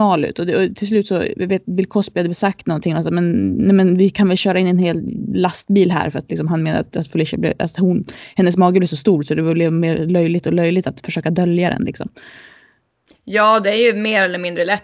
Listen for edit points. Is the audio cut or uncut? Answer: uncut